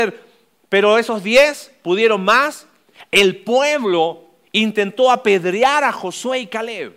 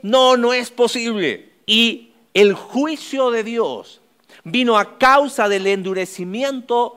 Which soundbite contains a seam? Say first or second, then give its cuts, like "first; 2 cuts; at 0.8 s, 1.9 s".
second; 1 cut; at 1.6 s